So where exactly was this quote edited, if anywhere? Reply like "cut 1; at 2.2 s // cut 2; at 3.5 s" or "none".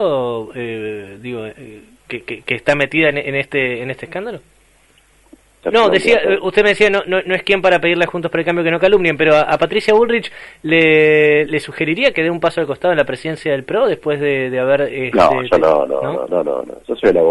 cut 1; at 5.6 s // cut 2; at 11.5 s // cut 3; at 16.3 s